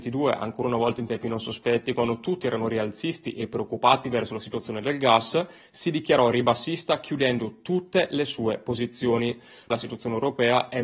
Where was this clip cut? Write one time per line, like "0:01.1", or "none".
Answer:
0:09.7